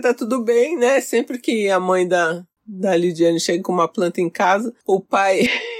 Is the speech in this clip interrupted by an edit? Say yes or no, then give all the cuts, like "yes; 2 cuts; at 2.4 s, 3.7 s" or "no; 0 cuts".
no; 0 cuts